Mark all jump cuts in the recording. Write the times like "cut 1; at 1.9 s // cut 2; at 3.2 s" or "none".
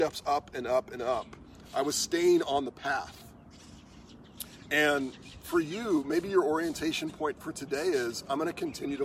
none